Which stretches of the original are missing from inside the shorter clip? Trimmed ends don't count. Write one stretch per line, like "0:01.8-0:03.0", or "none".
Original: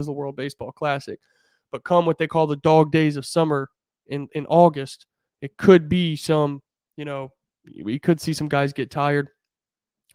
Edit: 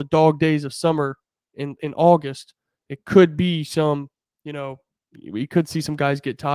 none